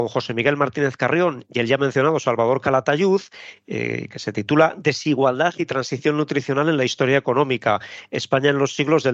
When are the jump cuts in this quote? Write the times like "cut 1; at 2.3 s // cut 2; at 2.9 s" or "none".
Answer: none